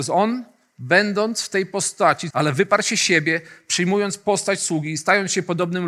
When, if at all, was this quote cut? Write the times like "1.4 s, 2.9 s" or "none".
2.3 s